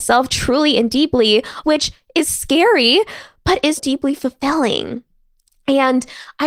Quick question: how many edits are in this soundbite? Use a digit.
2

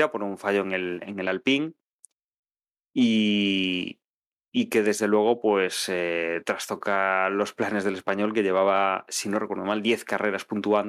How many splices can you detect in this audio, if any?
0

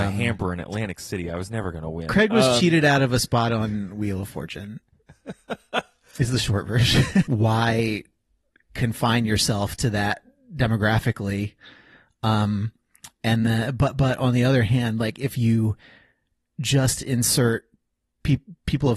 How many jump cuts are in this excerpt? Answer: 1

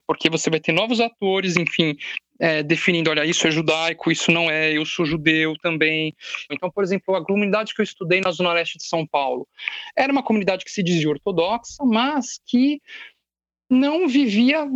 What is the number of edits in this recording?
1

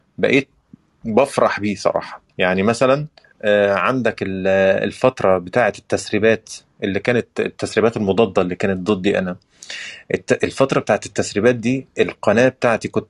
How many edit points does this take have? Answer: 1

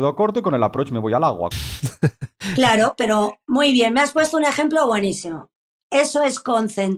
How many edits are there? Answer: 1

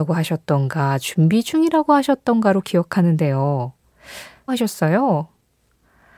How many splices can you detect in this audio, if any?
1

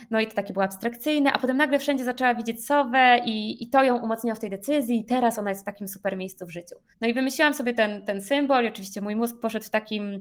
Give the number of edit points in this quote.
1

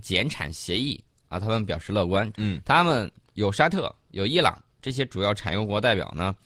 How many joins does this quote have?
1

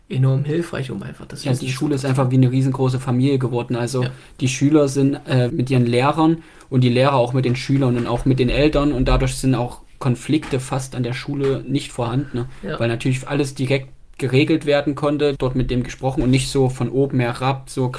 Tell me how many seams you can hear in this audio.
2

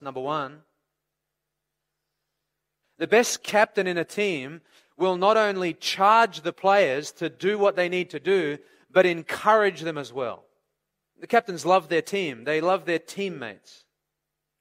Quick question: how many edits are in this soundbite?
2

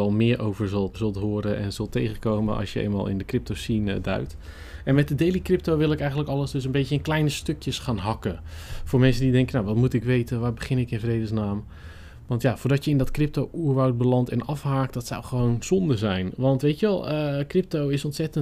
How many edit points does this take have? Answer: 1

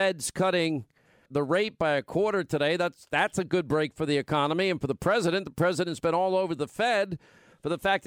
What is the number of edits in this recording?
1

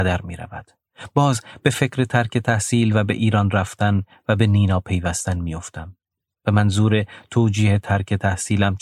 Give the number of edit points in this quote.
0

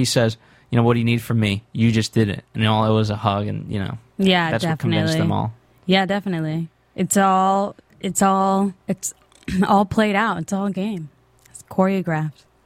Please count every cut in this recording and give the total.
1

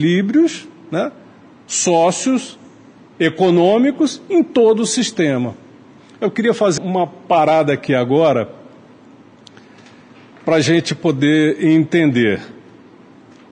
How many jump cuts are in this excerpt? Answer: 1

